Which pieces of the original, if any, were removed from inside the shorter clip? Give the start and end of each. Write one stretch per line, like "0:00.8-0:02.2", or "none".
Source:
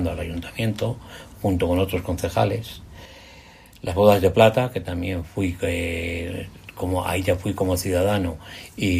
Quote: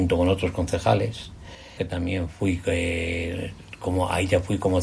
0:03.3-0:04.7